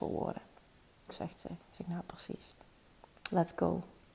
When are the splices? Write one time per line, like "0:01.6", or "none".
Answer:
0:01.1